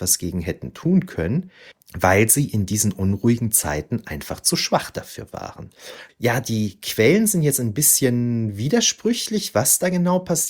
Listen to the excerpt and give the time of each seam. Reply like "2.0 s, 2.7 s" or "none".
6.1 s